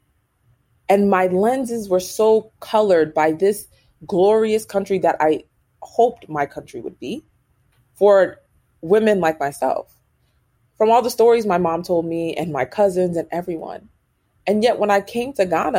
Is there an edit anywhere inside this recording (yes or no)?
no